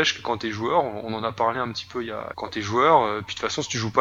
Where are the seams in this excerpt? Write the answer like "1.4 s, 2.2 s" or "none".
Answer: 2.3 s